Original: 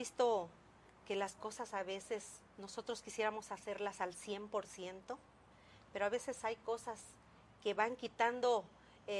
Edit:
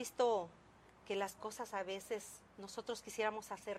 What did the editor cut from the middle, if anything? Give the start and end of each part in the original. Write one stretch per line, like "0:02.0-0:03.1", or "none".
none